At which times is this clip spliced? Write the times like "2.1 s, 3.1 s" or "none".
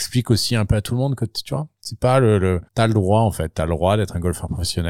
2.7 s